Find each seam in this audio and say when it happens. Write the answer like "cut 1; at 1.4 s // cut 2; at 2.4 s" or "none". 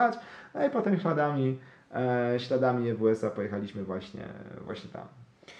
none